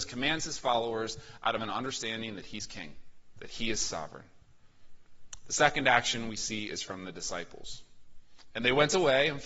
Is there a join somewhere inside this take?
yes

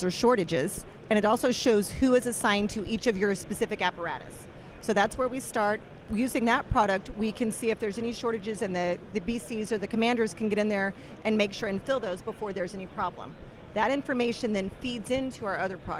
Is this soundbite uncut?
yes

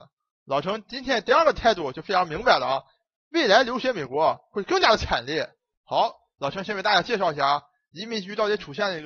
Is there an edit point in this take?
no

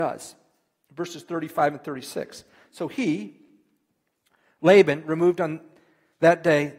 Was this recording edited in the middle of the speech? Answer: no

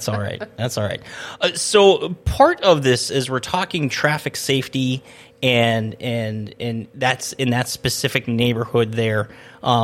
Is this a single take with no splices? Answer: yes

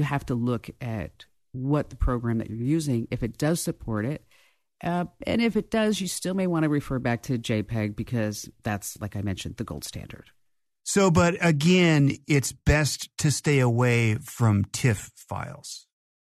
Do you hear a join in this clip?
no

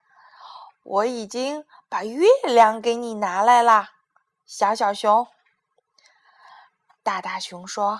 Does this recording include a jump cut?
no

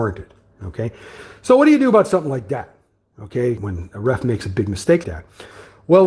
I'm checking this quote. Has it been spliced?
yes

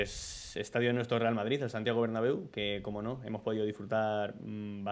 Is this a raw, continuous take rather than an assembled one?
yes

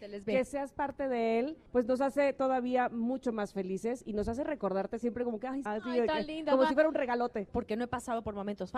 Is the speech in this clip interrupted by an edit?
yes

